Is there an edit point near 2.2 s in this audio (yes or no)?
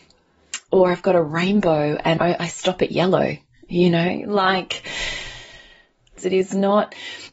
yes